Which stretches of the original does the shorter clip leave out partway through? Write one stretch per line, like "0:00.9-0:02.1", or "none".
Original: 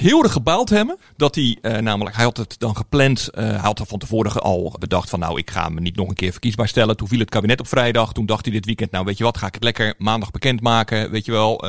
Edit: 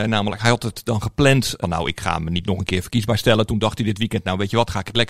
0:03.4-0:05.1
0:07.0-0:08.1